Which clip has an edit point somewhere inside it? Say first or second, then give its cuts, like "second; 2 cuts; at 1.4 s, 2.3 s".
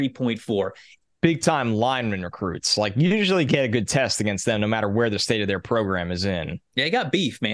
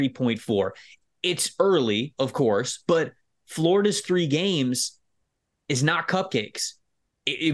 first; 1 cut; at 1.1 s